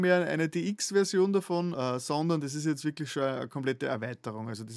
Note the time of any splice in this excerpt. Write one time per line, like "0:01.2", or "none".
0:01.7